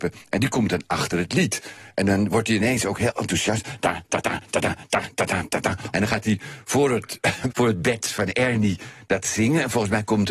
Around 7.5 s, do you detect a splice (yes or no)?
yes